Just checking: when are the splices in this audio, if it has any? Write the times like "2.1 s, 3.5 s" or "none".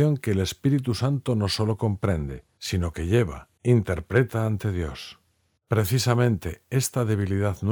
none